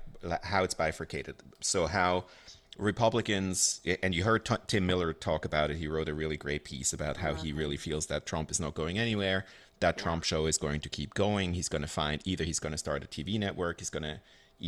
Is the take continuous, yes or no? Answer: yes